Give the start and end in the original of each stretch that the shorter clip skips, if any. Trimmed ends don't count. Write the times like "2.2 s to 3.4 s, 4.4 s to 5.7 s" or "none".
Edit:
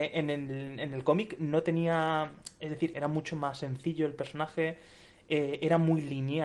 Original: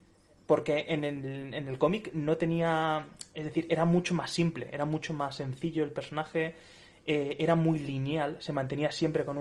3.7 s to 4.7 s